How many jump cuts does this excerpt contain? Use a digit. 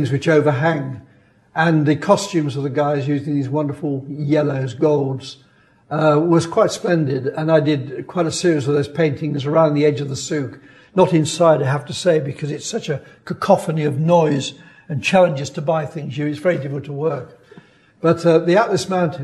0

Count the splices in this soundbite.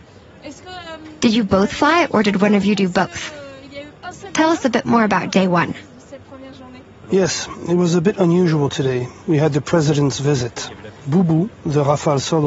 0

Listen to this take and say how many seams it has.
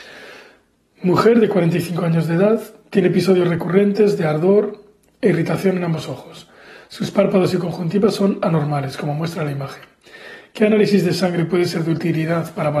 0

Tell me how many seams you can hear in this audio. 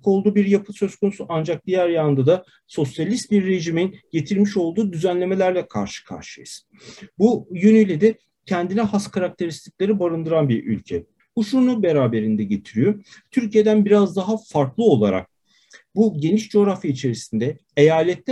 1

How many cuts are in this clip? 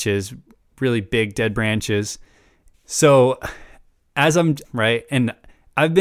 2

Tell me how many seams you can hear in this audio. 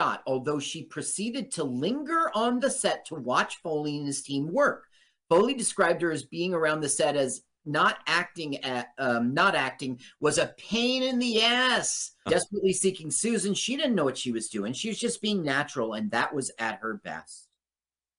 1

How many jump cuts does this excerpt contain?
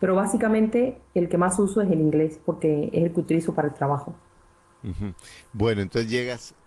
0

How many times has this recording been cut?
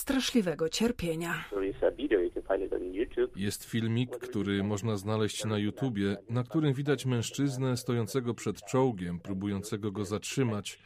0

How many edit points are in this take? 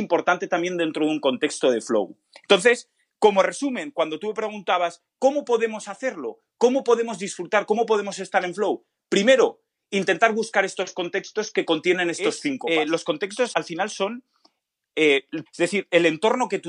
2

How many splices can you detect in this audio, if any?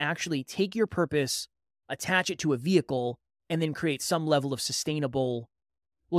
0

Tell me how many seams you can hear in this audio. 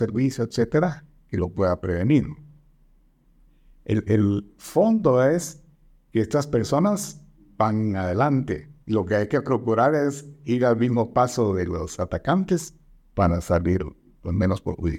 2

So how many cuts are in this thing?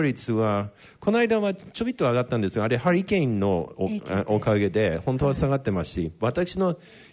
0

